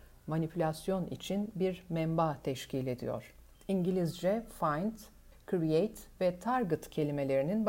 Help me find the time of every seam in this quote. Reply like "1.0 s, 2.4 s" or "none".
3.5 s, 5.3 s